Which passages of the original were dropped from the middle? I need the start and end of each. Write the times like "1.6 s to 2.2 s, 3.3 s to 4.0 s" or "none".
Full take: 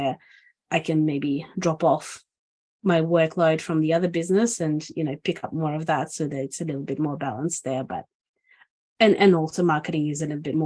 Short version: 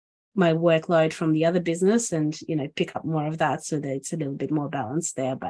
none